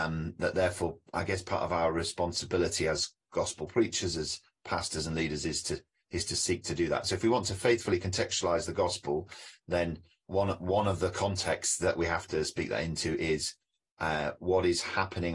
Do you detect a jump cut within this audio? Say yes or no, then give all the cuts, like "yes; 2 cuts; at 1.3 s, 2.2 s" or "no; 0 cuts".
yes; 1 cut; at 10.3 s